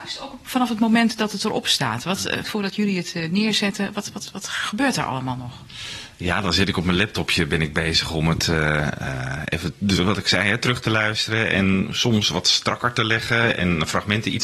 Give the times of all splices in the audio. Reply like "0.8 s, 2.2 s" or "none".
2.4 s